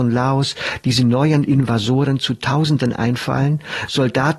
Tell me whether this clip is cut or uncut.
uncut